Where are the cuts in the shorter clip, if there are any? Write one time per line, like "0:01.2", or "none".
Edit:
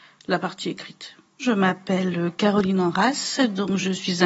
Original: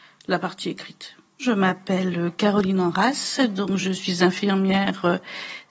none